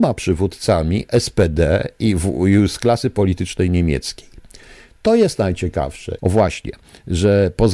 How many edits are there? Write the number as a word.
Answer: one